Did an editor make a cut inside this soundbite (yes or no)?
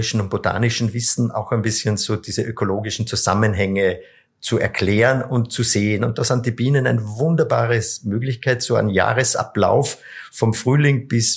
no